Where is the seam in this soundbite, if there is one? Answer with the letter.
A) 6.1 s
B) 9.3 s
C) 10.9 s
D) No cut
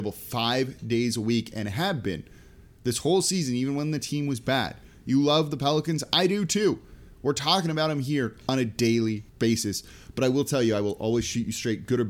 B